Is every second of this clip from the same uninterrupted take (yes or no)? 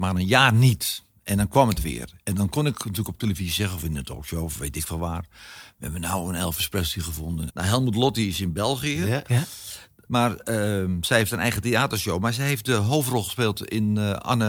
no